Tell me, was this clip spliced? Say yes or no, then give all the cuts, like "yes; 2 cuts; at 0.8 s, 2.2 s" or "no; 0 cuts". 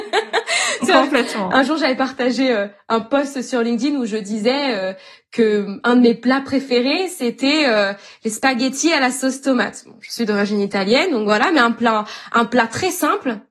no; 0 cuts